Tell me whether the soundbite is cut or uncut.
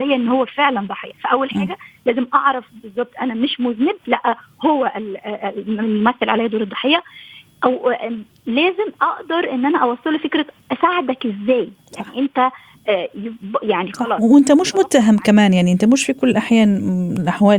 uncut